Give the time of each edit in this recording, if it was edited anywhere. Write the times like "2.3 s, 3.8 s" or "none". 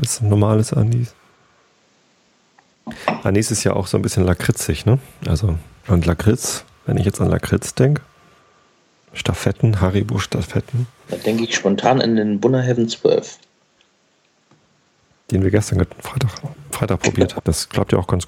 5.8 s, 11.1 s, 17.4 s

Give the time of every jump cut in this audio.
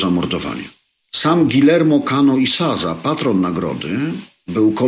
1.0 s

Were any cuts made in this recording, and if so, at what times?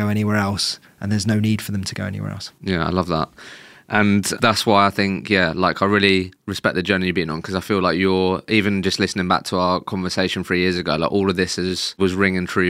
none

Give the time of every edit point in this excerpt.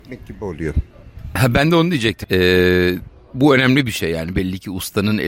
2.2 s

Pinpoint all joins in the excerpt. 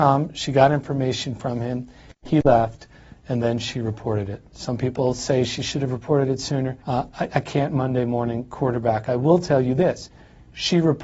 6.8 s

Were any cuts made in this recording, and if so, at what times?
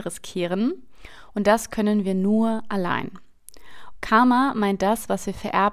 3.9 s

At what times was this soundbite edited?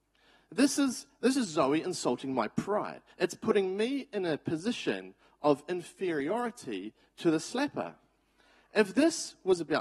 3.1 s

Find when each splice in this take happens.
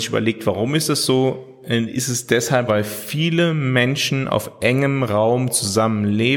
2.7 s

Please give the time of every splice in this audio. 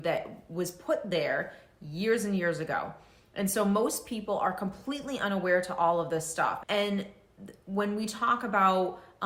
6.6 s

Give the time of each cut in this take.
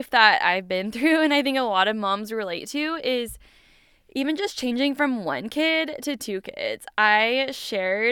none

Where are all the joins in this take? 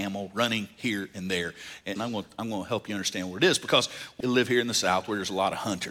2.0 s, 4.2 s

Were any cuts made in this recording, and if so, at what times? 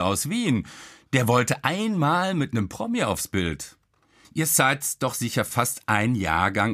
none

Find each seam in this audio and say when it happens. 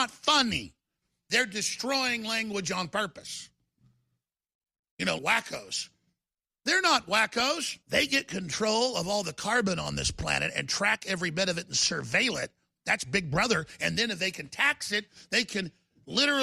5.2 s, 7.8 s

